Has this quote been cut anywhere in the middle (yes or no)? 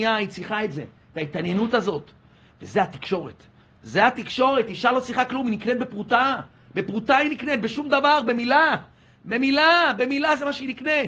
no